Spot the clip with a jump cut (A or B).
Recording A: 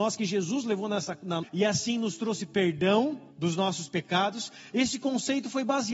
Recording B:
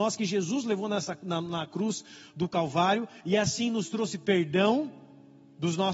A